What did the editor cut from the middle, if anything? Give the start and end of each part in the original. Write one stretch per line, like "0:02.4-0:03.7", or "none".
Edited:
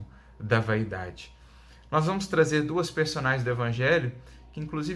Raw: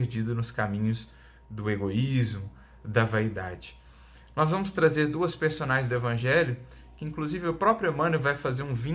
none